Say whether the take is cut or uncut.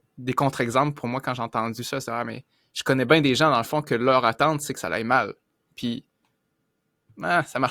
uncut